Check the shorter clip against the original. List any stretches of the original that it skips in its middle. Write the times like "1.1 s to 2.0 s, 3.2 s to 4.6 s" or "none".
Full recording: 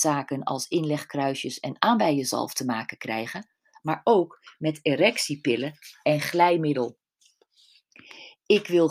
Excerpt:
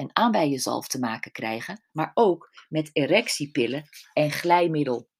3.6 s to 3.8 s